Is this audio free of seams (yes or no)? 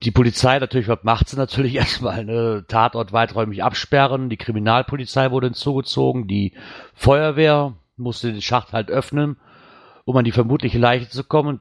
yes